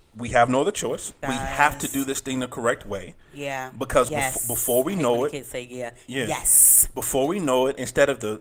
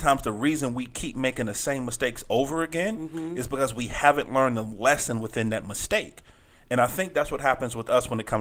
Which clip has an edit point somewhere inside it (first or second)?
first